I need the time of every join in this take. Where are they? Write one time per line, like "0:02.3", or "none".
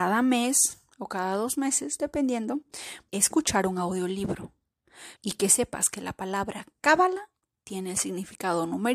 0:03.1
0:05.2